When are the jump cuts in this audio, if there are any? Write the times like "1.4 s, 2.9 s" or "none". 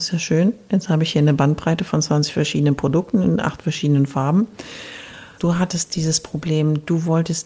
5.4 s